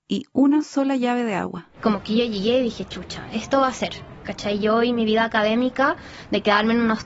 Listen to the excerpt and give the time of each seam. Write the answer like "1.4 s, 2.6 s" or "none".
none